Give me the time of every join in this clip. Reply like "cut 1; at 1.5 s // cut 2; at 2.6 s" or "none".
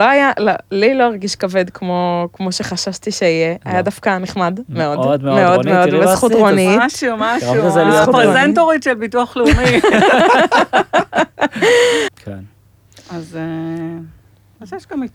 cut 1; at 12.1 s